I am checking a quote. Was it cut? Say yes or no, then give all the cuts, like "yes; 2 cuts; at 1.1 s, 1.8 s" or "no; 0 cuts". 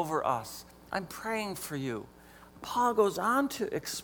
yes; 1 cut; at 2.5 s